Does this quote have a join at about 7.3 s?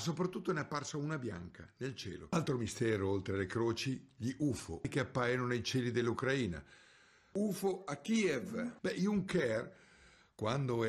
yes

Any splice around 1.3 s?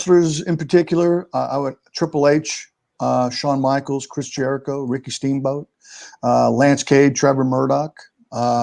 yes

